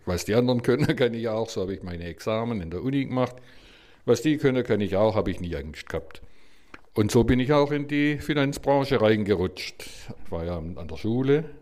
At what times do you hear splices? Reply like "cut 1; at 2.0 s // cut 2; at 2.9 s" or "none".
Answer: cut 1; at 10.2 s